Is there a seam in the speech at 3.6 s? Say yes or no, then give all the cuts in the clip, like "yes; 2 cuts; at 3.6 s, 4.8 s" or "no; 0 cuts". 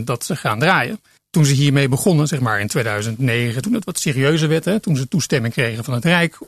yes; 1 cut; at 3.6 s